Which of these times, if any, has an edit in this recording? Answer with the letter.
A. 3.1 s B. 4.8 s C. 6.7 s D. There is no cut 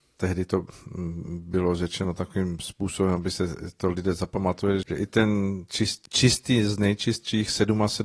B